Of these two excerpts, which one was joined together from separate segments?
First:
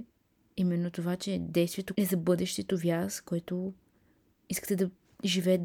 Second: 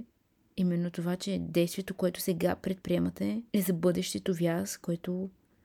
first; 1 cut; at 1.9 s

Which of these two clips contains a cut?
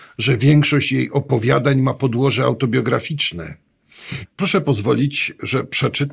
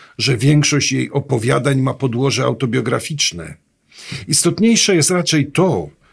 first; 1 cut; at 4.3 s

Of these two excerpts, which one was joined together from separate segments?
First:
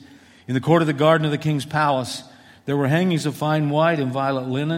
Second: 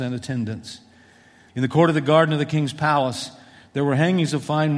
second; 1 cut; at 1.5 s

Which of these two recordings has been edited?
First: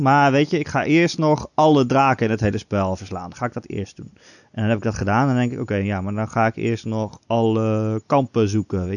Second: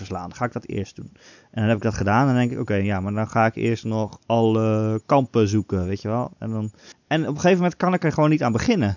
second; 1 cut; at 6.9 s

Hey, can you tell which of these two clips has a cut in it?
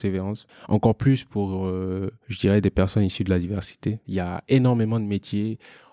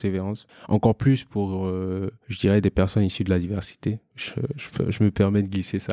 first; 1 cut; at 4.0 s

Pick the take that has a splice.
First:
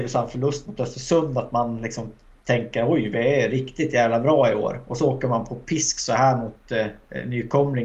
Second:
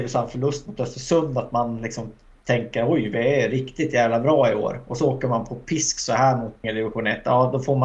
second; 1 cut; at 6.6 s

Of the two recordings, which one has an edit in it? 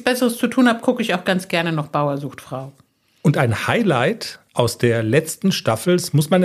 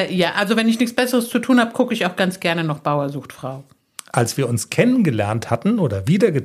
second; 1 cut; at 4.0 s

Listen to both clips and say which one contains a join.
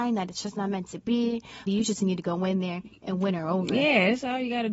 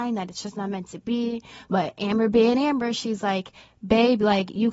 first; 1 cut; at 1.7 s

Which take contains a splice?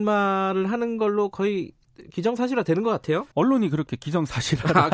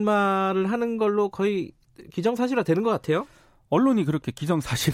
first; 1 cut; at 3.3 s

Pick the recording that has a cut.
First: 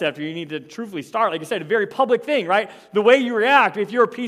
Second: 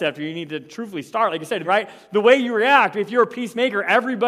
second; 1 cut; at 1.6 s

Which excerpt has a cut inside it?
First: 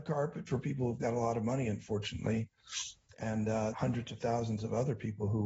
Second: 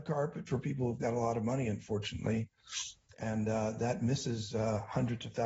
first; 1 cut; at 3.7 s

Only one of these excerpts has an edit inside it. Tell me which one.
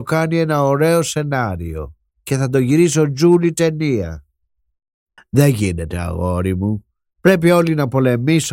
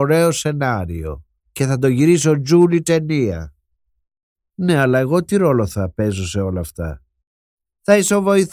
first; 1 cut; at 5.2 s

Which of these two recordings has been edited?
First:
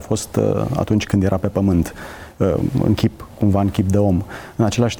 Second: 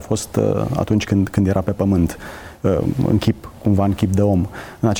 first; 1 cut; at 1.1 s

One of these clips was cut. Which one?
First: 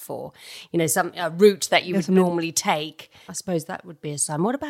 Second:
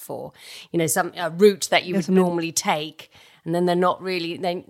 first; 1 cut; at 3.3 s

